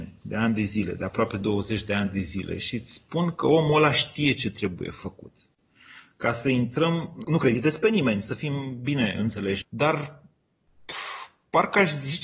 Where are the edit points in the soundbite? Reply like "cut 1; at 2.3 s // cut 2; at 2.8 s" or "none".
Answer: cut 1; at 7.2 s // cut 2; at 9.6 s

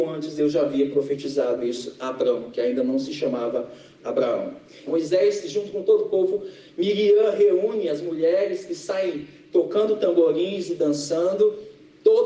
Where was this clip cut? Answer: cut 1; at 4.9 s // cut 2; at 6.7 s

